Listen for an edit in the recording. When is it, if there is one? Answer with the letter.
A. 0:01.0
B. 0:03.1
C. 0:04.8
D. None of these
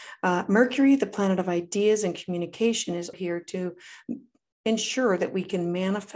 B